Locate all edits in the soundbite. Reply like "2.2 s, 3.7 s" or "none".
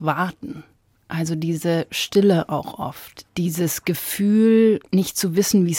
3.3 s